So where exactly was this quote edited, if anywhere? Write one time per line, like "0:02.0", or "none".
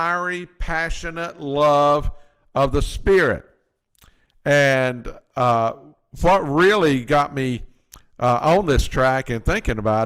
none